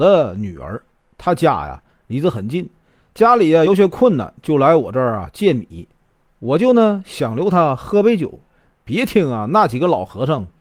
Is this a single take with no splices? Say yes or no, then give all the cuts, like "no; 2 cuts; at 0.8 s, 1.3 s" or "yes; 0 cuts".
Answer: yes; 0 cuts